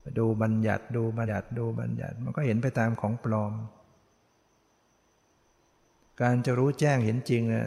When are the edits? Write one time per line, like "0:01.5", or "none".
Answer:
0:01.3